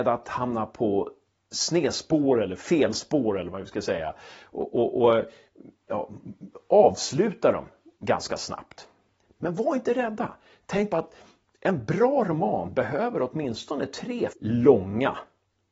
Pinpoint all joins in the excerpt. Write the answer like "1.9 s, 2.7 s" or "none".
14.3 s